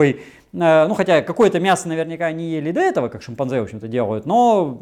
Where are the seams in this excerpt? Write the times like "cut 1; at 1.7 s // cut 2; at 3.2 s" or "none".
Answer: none